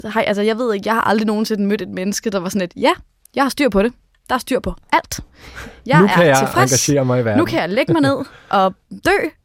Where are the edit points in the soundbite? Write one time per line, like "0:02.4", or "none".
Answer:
none